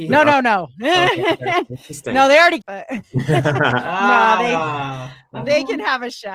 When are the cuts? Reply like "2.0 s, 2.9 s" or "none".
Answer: 2.6 s